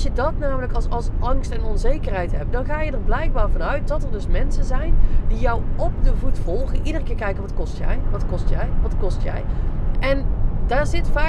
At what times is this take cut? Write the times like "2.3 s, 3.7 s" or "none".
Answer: 9.9 s

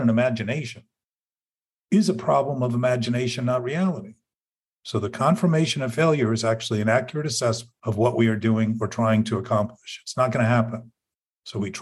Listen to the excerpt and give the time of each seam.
4.7 s, 7.8 s

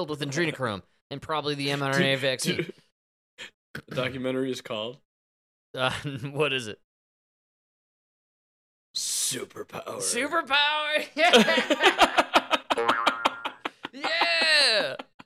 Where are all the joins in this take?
3.5 s

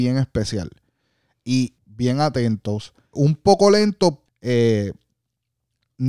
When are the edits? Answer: 1.8 s, 3.1 s, 4.2 s

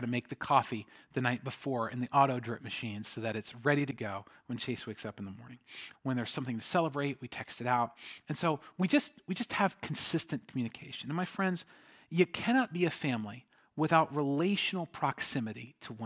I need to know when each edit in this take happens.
5.9 s

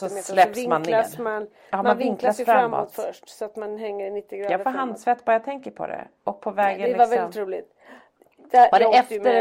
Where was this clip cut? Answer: none

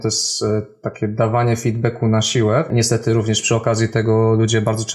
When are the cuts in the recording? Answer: 2.7 s

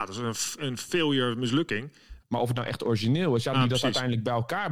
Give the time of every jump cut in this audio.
2.2 s, 3.5 s

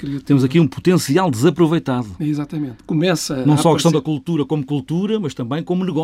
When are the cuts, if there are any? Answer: 2.8 s

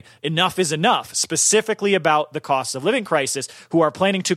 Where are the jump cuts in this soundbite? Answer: none

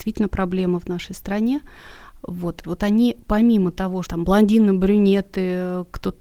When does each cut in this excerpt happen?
2.6 s, 4.1 s

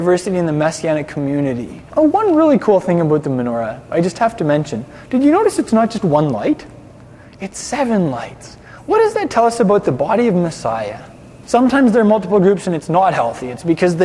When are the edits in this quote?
1.9 s, 11.4 s

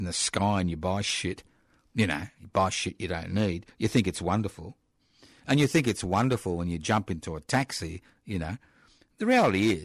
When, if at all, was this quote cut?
none

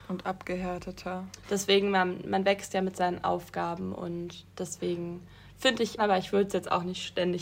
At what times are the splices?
1.4 s, 6.0 s

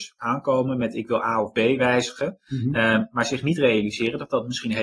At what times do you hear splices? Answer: none

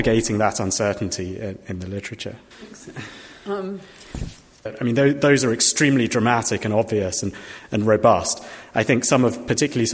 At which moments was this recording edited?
2.5 s, 4.7 s

